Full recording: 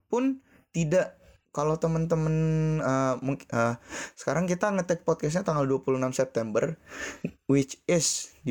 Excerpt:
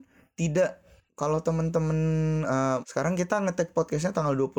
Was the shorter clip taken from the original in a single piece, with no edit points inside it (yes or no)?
no